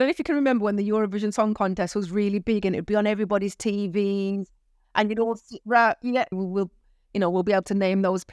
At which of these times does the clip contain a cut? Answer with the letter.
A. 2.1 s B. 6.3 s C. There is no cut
B